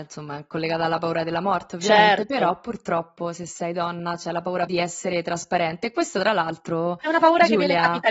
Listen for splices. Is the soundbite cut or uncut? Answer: cut